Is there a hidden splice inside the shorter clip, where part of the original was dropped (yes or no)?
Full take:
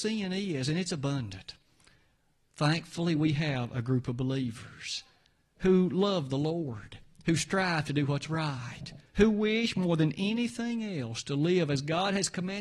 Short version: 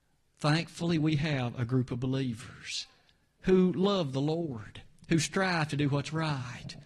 no